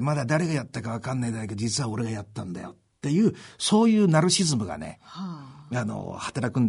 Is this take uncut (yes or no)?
yes